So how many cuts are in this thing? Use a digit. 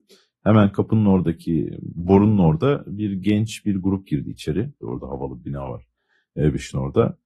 1